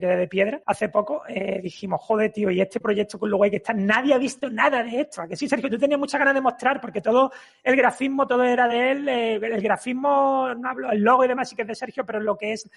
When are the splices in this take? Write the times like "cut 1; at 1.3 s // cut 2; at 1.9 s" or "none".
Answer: none